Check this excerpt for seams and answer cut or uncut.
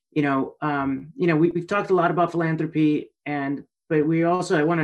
uncut